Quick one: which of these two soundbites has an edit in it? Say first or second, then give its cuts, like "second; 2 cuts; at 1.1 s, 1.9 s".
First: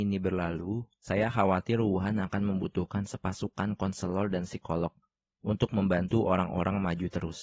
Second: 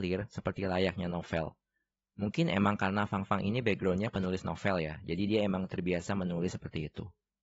second; 1 cut; at 2.1 s